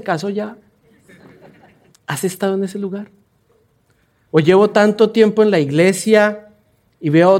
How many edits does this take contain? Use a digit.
2